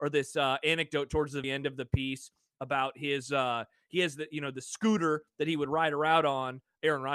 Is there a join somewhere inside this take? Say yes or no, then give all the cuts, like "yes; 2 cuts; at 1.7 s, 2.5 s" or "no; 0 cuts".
yes; 1 cut; at 1.4 s